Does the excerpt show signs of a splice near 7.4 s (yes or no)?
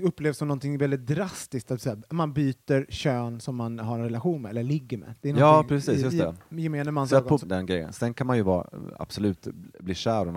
yes